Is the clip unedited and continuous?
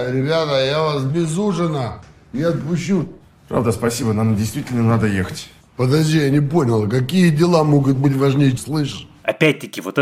no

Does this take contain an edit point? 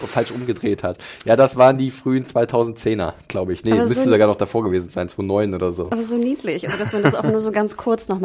no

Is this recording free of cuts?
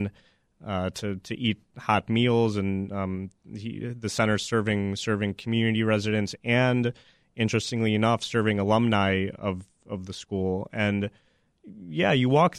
yes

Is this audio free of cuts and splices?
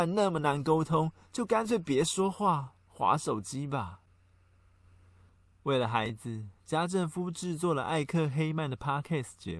yes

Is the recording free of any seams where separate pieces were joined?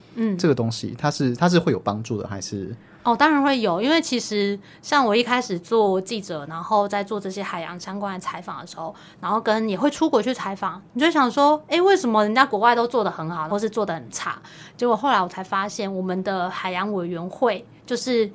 no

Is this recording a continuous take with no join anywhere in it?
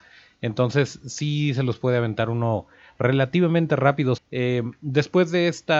no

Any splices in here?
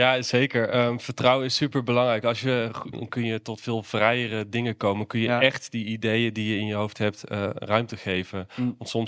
yes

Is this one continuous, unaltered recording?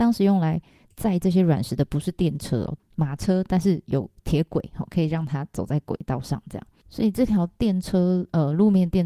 no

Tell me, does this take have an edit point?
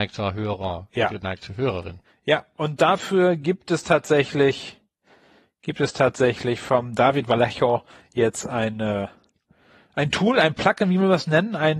no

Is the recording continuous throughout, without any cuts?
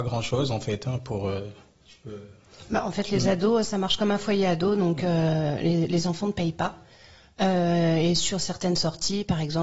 yes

